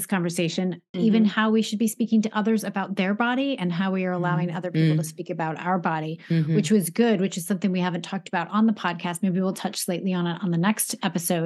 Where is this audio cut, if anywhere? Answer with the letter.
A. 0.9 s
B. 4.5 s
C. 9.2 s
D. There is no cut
A